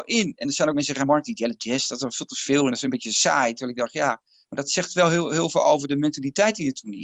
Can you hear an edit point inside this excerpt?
no; 0 cuts

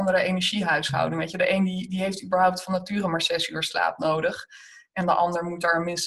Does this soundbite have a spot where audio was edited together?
no; 0 cuts

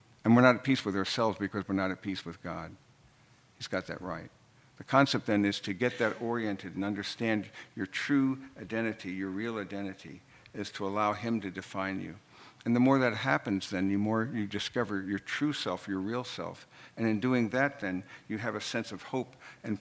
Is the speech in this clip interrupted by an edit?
no; 0 cuts

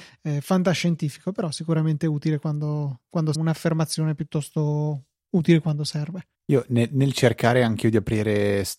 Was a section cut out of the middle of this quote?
yes; 2 cuts; at 3.3 s, 6.3 s

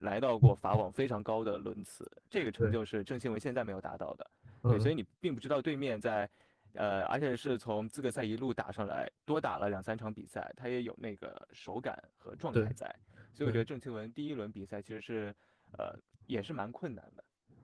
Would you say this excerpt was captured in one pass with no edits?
yes; 0 cuts

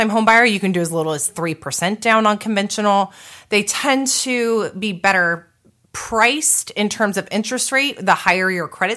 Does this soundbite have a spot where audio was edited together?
no; 0 cuts

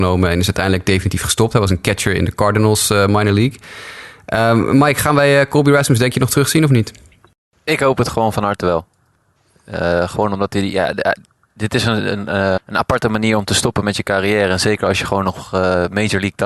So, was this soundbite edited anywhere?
yes; 1 cut; at 12.6 s

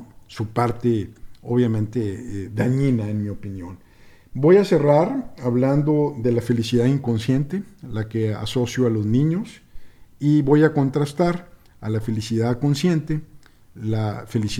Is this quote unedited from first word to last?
yes; 0 cuts

